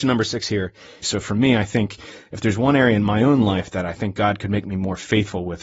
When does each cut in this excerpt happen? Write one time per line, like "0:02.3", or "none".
0:01.0